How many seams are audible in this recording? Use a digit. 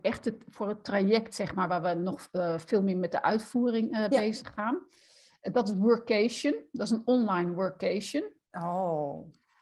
0